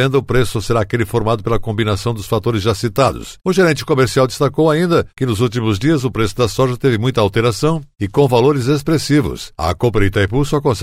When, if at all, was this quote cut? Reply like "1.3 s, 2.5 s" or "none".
none